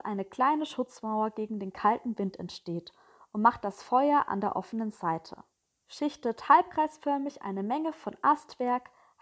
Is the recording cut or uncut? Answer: cut